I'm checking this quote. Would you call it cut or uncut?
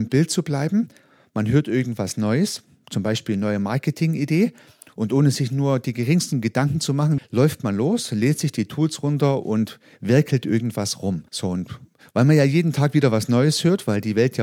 cut